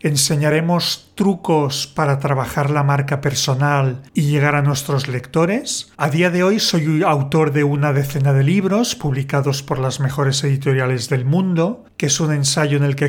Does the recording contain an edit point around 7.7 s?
no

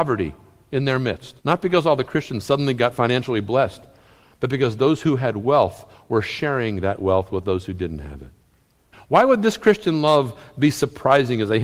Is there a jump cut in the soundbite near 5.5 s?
no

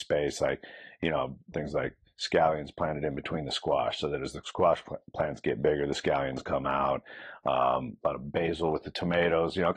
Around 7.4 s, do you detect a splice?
no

